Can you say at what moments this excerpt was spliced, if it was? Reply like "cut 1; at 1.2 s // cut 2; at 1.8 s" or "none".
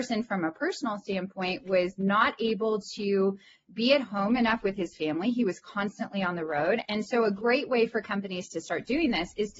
cut 1; at 6.8 s

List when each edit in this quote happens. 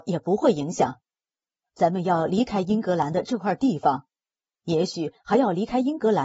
none

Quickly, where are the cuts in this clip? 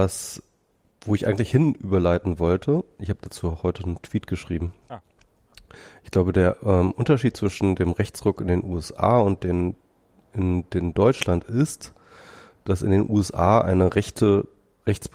none

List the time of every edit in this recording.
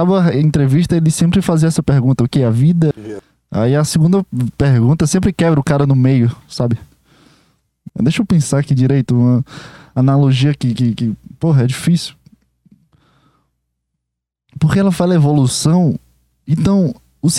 cut 1; at 2.9 s // cut 2; at 7.9 s

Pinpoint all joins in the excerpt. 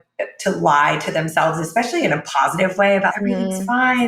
cut 1; at 3.1 s

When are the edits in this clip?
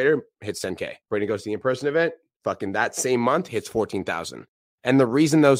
cut 1; at 1.0 s

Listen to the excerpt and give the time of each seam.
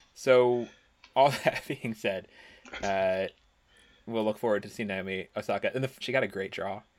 cut 1; at 6.0 s

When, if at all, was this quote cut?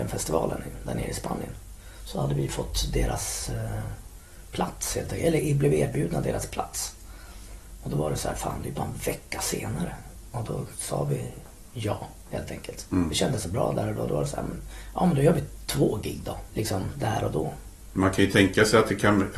cut 1; at 16.5 s // cut 2; at 17.9 s

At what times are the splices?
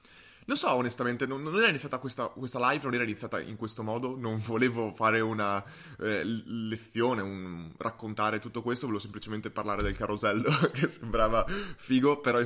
none

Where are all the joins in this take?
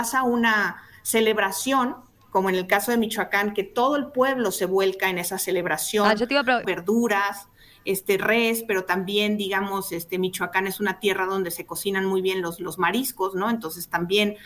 cut 1; at 6.6 s

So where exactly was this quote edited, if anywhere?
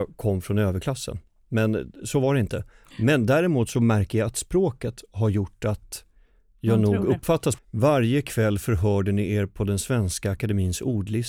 cut 1; at 7.6 s

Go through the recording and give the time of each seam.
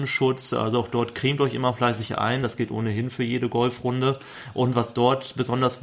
none

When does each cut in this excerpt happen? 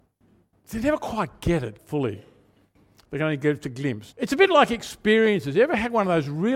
cut 1; at 1.8 s // cut 2; at 4.1 s

